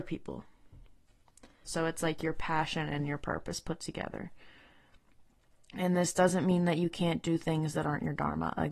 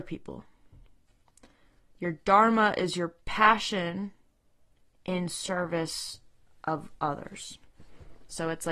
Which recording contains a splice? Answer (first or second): first